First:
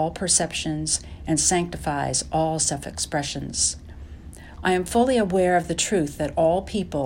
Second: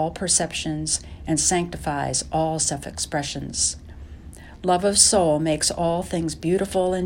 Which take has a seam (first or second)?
first